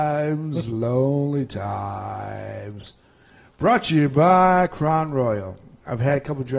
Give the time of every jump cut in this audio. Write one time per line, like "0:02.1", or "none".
none